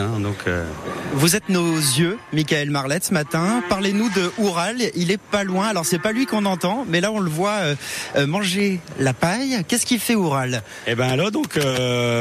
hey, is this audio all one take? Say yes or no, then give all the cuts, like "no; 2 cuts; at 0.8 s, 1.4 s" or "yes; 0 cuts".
yes; 0 cuts